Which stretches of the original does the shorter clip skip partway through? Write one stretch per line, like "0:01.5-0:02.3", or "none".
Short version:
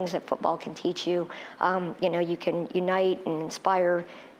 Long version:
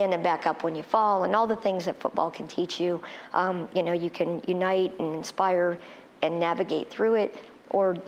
none